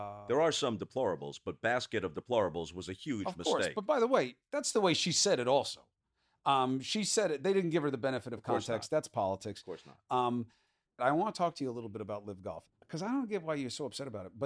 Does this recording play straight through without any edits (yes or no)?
no